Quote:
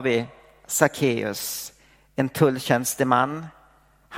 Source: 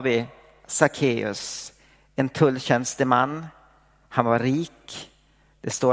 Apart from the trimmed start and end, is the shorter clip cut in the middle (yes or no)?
no